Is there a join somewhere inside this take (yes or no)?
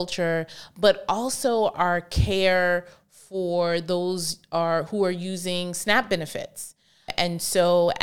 no